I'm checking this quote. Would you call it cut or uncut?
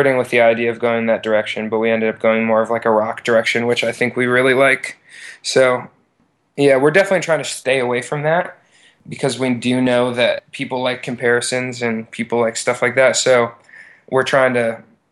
uncut